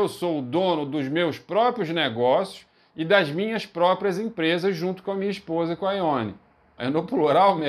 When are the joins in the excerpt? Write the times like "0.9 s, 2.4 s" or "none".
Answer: 6.8 s